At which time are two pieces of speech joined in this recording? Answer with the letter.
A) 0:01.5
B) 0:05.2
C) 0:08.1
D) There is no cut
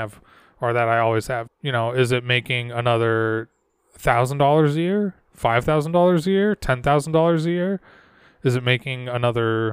A